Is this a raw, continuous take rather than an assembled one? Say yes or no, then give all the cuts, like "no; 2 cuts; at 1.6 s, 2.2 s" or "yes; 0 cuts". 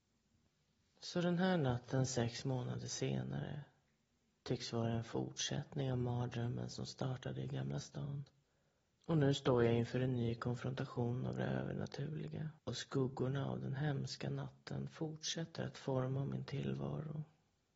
no; 2 cuts; at 8.9 s, 12.6 s